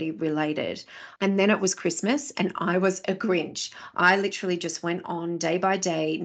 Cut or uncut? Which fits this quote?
cut